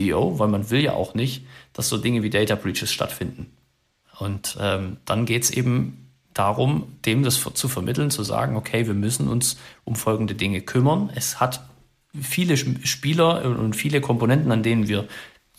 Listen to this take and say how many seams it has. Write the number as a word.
one